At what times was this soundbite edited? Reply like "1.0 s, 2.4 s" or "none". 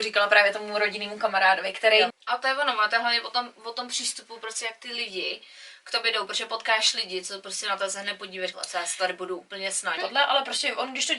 2.1 s, 8.5 s, 10.0 s